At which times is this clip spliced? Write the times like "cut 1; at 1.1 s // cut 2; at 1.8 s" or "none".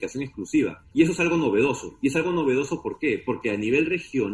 none

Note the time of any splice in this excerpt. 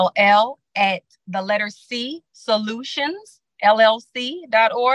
none

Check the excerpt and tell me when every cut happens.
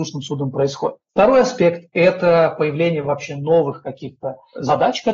none

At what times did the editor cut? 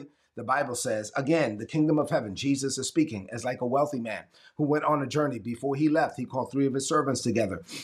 none

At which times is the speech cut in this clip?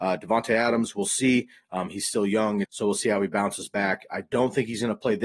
cut 1; at 2.6 s

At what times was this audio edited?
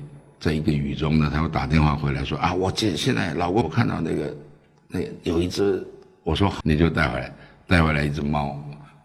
cut 1; at 3.6 s // cut 2; at 6.6 s

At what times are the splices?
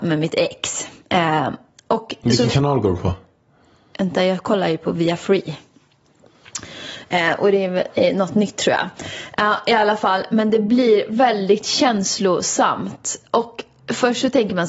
none

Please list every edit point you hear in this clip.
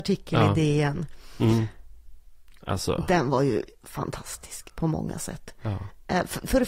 none

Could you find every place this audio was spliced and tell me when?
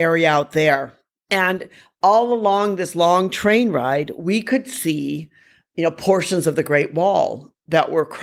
none

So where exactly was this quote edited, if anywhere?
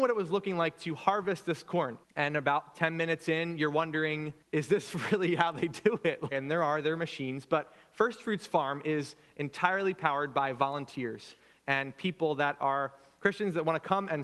cut 1; at 2.0 s // cut 2; at 4.4 s // cut 3; at 6.3 s

